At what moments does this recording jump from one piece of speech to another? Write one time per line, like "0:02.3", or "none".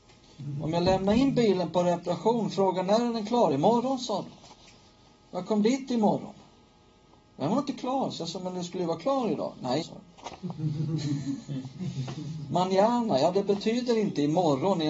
0:09.8